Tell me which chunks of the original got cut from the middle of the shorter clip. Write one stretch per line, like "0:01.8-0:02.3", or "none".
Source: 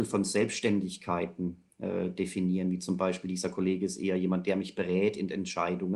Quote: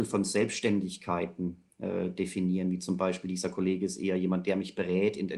none